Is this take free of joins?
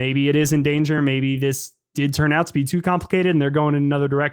yes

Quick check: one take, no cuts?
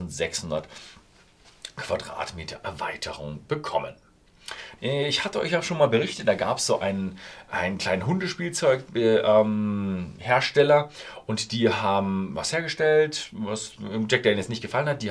no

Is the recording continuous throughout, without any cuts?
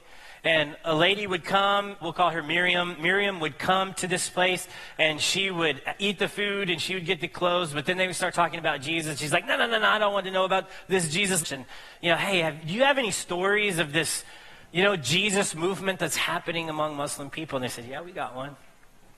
no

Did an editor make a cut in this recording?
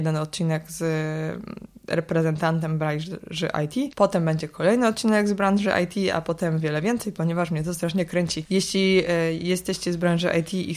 yes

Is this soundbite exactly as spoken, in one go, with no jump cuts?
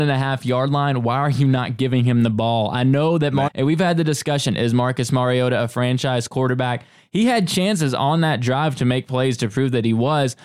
no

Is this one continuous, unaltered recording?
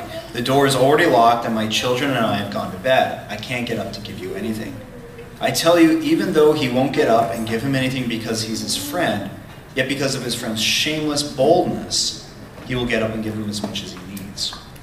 yes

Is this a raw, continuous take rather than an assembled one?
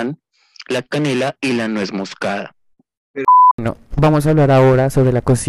yes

